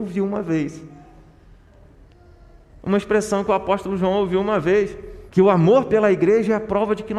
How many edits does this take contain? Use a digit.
1